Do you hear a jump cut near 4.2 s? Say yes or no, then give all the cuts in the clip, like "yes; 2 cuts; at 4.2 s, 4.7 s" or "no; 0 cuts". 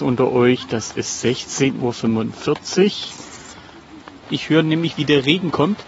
yes; 1 cut; at 4.2 s